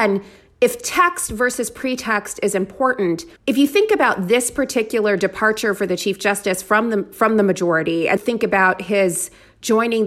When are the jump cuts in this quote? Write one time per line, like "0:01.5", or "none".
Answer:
0:03.4
0:08.2